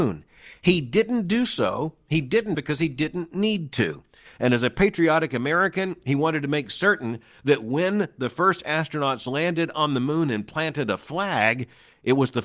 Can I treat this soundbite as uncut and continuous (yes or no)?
no